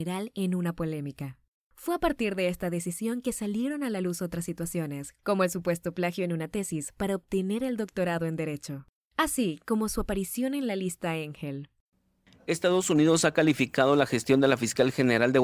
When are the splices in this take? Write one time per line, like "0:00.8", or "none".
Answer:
none